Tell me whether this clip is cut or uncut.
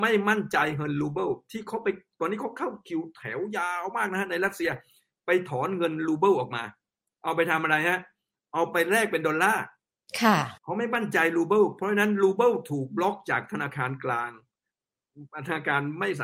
cut